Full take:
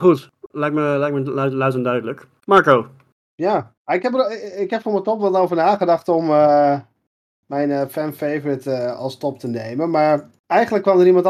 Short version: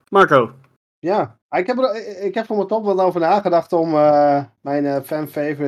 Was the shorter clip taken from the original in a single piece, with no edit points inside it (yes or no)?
no